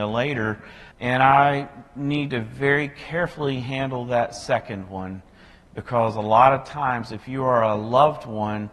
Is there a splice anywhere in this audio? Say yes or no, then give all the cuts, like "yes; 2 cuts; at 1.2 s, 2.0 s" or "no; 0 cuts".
yes; 1 cut; at 0.9 s